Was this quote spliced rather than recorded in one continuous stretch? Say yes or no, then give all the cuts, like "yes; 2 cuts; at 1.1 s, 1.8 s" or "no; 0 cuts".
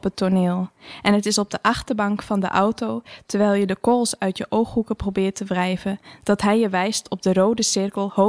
no; 0 cuts